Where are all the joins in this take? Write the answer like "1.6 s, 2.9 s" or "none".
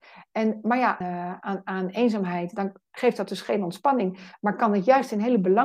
1.0 s